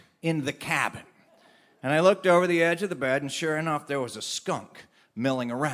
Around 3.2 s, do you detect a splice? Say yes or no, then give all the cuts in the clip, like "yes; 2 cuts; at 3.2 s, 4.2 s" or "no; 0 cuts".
no; 0 cuts